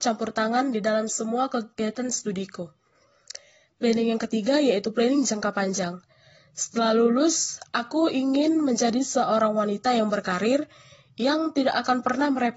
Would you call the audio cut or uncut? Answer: uncut